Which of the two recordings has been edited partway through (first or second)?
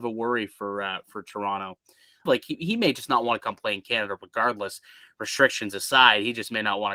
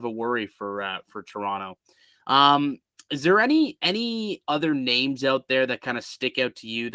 first